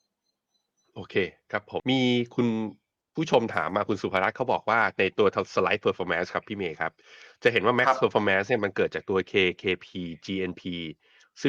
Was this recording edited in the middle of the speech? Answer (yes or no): yes